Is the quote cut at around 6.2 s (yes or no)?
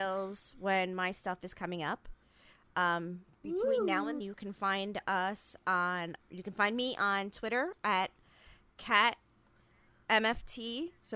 yes